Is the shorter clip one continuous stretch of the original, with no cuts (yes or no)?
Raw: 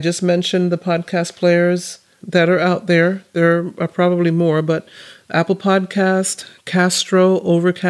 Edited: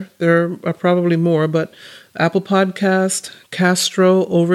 yes